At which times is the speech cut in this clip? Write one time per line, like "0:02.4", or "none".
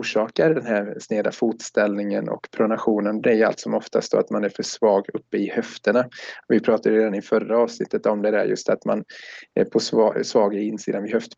none